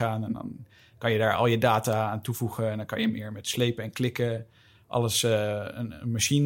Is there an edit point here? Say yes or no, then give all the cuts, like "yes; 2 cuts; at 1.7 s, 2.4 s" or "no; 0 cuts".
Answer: no; 0 cuts